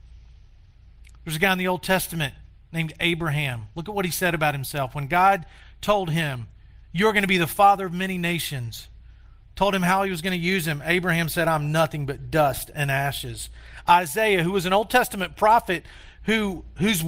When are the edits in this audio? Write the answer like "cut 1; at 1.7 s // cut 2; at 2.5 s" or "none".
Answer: none